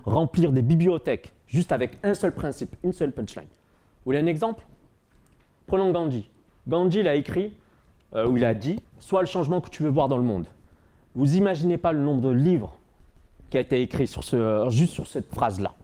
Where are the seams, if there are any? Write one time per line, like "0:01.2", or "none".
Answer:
none